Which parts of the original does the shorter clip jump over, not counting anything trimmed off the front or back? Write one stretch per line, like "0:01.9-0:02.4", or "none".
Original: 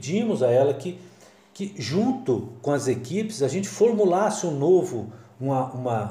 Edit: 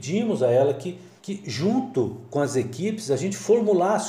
0:01.2-0:01.5

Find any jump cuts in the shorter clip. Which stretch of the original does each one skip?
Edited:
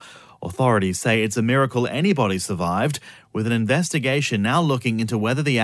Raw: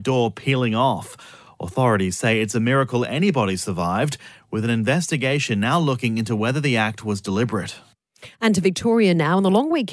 none

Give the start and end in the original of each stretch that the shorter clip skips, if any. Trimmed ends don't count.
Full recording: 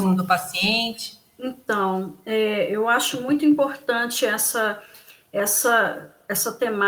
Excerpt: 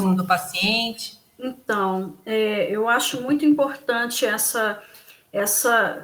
none

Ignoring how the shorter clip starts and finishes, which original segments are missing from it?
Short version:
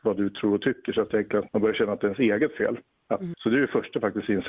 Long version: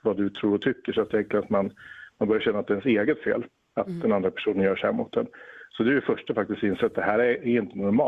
0:01.5-0:02.1
0:04.0-0:05.7

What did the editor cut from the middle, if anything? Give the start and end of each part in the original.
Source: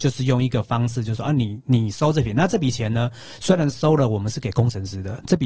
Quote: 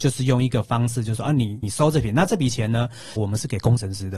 0:01.6-0:01.8
0:03.4-0:04.1

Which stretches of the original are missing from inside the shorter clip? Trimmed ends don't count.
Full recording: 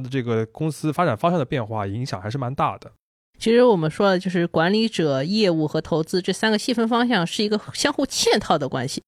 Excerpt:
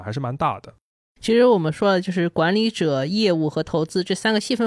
none

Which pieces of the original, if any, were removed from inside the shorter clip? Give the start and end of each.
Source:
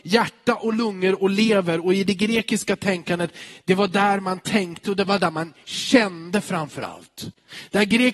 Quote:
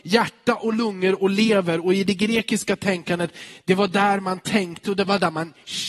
none

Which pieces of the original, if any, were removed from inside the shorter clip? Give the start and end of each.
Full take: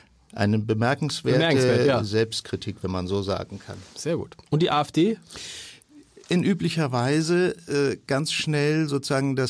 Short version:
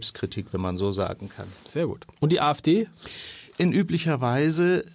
0:05.8-0:06.2

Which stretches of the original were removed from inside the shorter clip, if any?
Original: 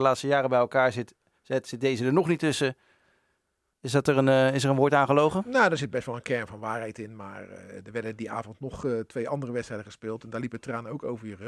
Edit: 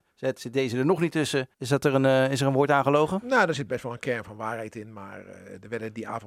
0:02.8-0:03.8

